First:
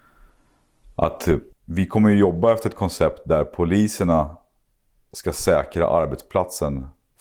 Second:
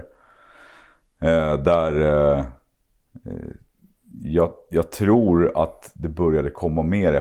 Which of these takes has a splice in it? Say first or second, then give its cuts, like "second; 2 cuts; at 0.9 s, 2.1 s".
first; 1 cut; at 1.5 s